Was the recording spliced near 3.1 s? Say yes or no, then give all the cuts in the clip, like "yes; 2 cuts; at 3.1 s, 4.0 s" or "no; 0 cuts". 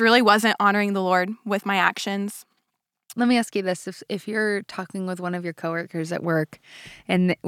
yes; 1 cut; at 3.1 s